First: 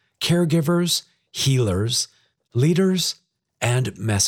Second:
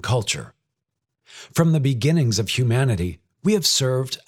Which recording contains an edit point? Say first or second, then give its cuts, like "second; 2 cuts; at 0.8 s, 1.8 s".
first; 1 cut; at 2.4 s